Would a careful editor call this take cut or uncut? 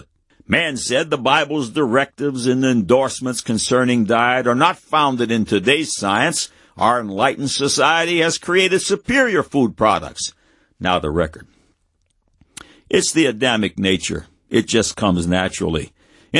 uncut